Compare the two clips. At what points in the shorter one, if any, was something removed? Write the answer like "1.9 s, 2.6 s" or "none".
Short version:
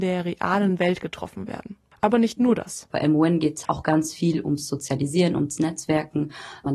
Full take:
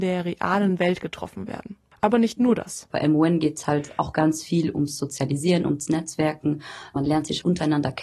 3.7 s